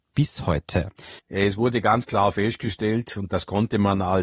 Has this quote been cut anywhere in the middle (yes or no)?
yes